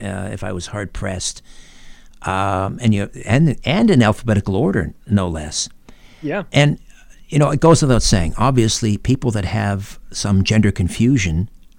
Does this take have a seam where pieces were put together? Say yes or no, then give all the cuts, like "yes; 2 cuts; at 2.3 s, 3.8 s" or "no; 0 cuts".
yes; 1 cut; at 5.0 s